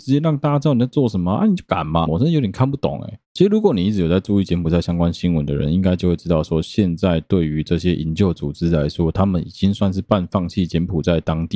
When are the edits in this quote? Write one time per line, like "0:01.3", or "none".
0:02.1